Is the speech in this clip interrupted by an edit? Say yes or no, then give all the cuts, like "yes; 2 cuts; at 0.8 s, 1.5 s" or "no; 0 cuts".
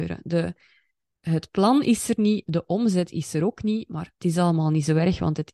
no; 0 cuts